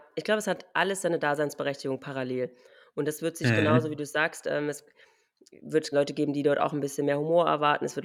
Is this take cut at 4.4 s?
no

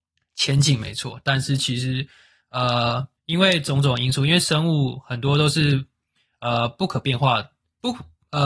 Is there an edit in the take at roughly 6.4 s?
no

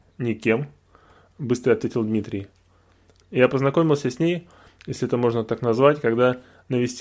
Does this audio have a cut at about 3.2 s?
yes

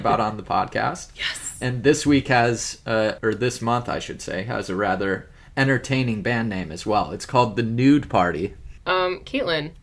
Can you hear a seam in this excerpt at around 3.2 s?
yes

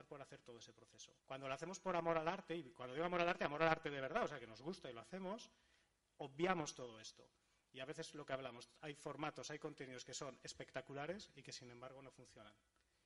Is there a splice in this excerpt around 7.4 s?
no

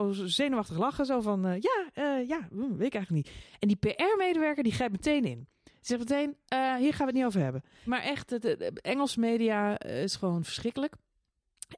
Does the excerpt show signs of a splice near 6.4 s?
no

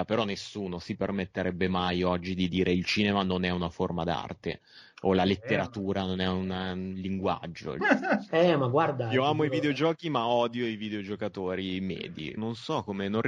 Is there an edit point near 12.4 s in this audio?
yes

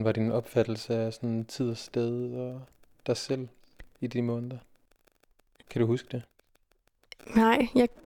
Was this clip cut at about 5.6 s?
yes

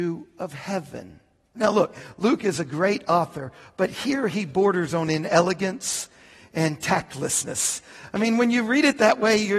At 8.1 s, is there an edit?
no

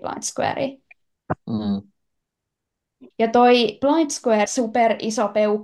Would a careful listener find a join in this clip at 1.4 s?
no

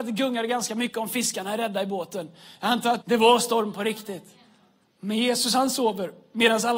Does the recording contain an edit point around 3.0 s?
yes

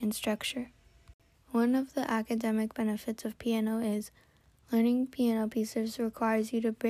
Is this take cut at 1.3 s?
yes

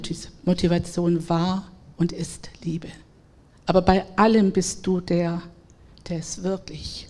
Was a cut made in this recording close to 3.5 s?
yes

